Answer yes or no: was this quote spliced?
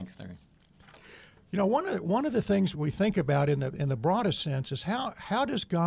yes